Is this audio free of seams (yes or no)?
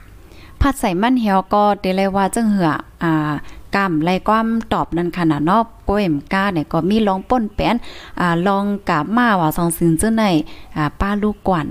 yes